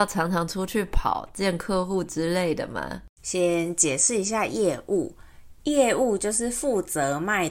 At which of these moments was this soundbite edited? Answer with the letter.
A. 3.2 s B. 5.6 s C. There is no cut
A